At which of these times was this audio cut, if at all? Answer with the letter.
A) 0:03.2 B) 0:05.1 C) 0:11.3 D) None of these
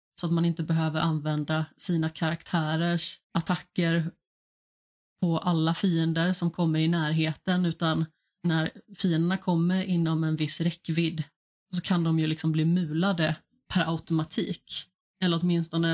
A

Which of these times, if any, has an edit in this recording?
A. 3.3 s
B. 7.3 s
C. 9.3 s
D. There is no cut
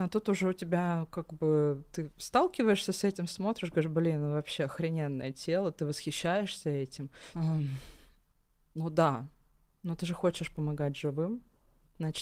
B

